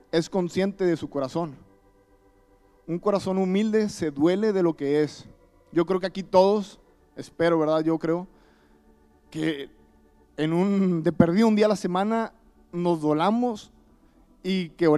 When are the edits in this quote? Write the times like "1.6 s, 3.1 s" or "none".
none